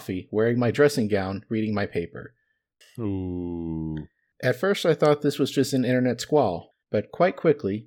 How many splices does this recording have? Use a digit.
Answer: 2